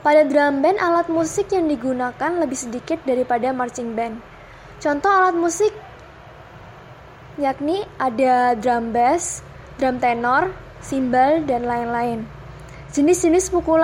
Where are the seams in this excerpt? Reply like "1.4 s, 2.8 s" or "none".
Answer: none